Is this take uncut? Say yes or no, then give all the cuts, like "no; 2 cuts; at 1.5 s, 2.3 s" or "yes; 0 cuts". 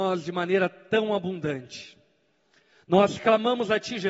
yes; 0 cuts